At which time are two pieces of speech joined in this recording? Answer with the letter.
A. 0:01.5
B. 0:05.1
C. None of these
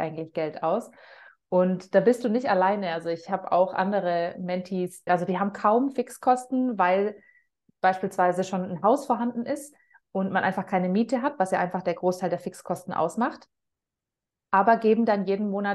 B